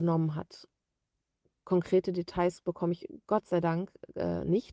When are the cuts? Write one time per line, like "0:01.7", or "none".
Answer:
none